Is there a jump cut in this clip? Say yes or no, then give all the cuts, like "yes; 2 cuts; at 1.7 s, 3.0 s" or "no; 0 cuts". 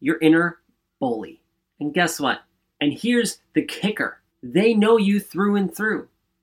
yes; 2 cuts; at 2.7 s, 4.3 s